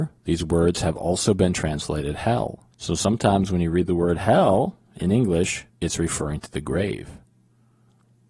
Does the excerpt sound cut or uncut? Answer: cut